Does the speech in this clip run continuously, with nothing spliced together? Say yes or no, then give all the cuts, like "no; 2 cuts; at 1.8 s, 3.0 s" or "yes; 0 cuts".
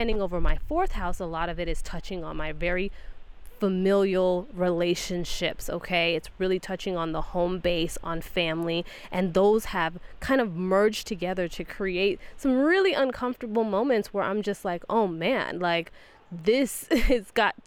yes; 0 cuts